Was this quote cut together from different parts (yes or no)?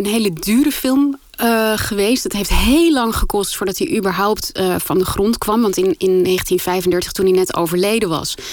no